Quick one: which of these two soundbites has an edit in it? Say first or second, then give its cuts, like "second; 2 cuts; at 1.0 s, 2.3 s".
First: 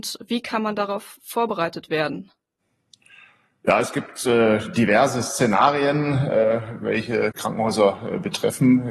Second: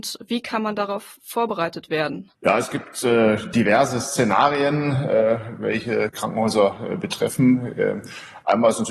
second; 1 cut; at 2.3 s